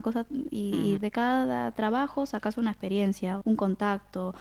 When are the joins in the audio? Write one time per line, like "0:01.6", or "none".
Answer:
0:01.0
0:03.4